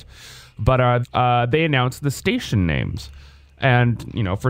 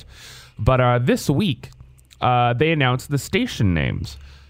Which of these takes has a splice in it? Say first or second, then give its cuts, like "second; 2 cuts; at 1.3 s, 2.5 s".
first; 1 cut; at 1.0 s